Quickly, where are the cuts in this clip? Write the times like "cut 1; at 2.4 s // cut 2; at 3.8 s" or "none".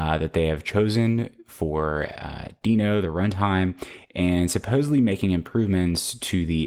none